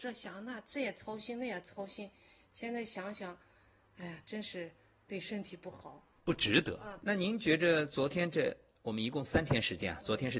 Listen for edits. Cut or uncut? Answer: cut